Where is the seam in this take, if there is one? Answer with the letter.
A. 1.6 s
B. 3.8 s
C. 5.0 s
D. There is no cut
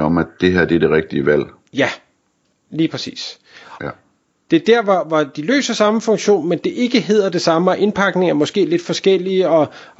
B